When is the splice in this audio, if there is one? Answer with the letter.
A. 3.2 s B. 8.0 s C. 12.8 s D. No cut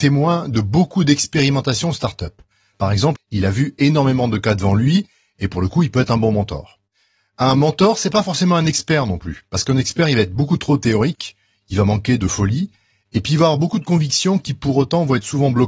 A